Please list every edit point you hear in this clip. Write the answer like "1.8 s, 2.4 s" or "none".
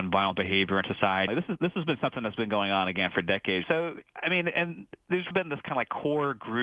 1.3 s, 3.6 s, 5.3 s